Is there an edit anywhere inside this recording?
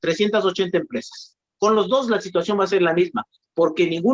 yes; 1 cut; at 1.5 s

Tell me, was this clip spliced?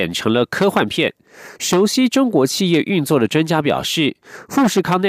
yes; 1 cut; at 1.6 s

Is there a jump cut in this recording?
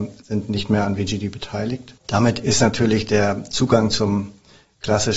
yes; 1 cut; at 2.0 s

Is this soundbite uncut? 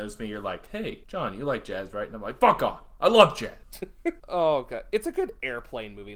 yes; 0 cuts

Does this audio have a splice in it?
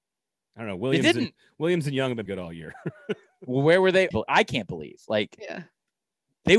yes; 2 cuts; at 2.3 s, 4.1 s

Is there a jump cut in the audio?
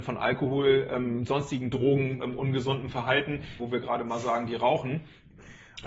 yes; 2 cuts; at 2.2 s, 3.6 s

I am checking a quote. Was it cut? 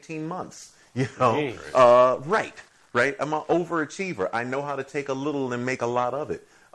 no; 0 cuts

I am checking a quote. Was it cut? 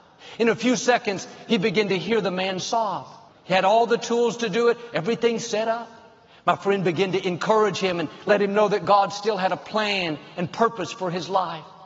yes; 1 cut; at 3.3 s

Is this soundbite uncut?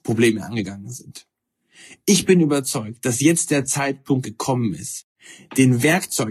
yes; 0 cuts

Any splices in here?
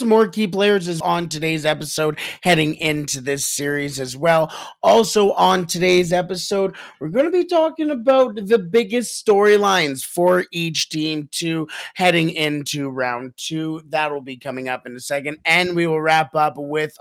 yes; 1 cut; at 1.0 s

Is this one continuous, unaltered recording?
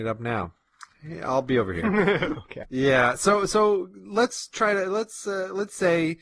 yes; 0 cuts

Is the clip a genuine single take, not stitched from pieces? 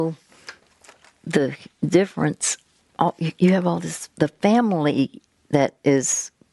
yes; 0 cuts

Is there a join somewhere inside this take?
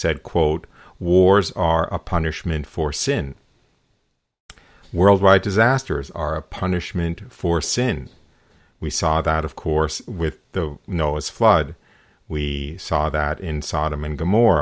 no; 0 cuts

